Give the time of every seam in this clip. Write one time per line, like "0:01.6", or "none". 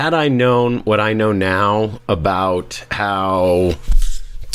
none